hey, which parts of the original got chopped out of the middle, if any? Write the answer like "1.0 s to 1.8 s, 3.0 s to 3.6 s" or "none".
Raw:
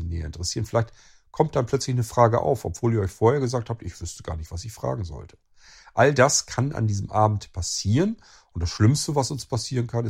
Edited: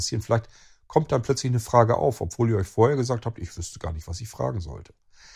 none